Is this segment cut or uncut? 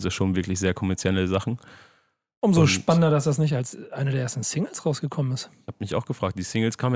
uncut